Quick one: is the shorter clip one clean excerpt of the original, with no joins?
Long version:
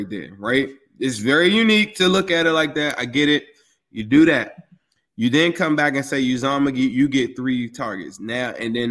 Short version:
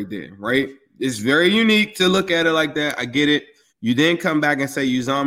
no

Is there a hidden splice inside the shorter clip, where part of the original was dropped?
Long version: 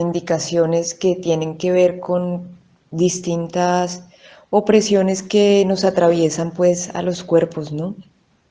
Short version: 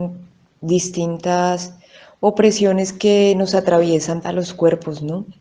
yes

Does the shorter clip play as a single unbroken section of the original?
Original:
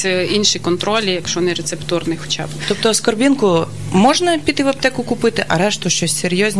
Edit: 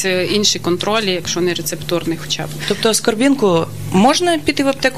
yes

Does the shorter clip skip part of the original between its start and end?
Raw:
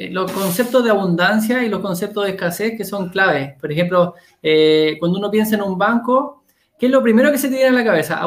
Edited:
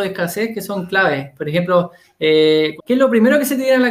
yes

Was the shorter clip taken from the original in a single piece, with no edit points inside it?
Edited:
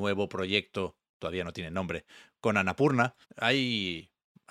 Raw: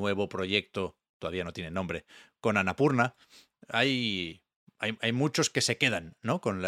no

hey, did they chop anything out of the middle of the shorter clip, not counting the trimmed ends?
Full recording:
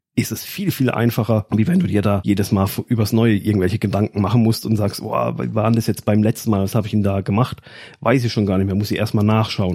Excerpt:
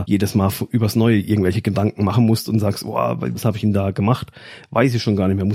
yes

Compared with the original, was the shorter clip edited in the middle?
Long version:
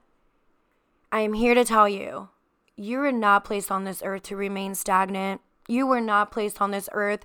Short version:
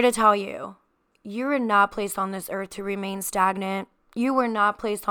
no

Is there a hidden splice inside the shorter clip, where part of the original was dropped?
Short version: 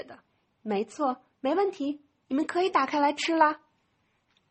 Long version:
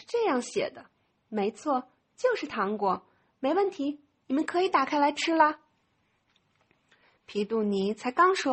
yes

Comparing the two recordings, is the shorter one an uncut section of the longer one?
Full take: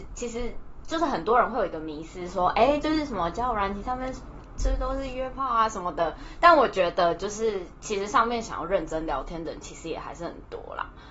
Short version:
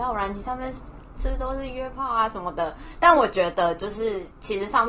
yes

